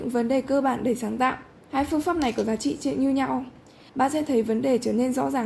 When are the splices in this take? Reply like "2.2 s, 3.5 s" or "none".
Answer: 1.6 s, 3.9 s